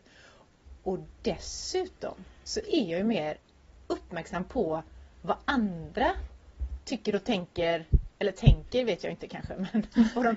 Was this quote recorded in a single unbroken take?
yes; 0 cuts

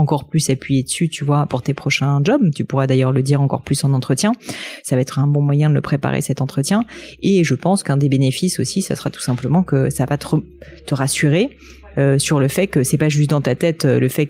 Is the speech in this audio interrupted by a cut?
no; 0 cuts

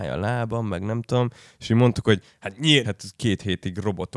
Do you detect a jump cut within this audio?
yes; 1 cut; at 2.8 s

